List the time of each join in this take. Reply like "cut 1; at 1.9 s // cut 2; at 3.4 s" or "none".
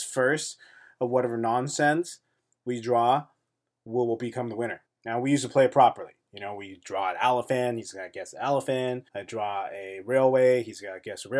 cut 1; at 4.9 s // cut 2; at 9.1 s